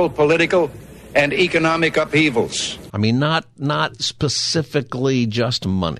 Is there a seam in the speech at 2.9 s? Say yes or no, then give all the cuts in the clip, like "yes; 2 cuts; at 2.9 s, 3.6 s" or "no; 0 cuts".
yes; 1 cut; at 2.9 s